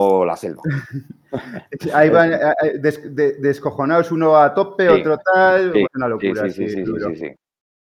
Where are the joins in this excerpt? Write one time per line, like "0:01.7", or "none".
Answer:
0:05.8
0:06.8